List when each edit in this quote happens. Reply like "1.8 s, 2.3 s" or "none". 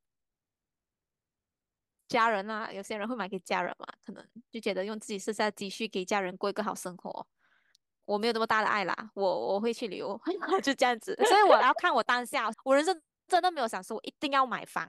12.5 s